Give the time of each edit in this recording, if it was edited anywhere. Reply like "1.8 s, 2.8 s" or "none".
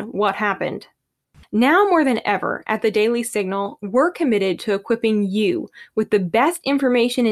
1.4 s